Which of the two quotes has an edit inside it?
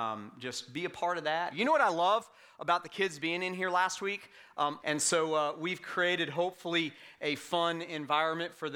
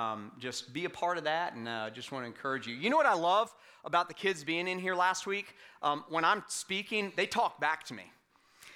first; 2 cuts; at 1.5 s, 4.8 s

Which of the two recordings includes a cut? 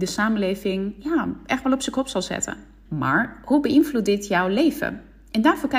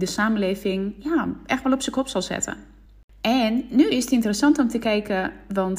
first; 1 cut; at 2.9 s

